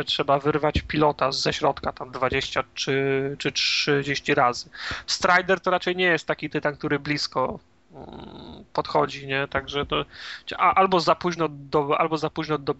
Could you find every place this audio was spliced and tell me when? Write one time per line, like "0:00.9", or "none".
0:01.3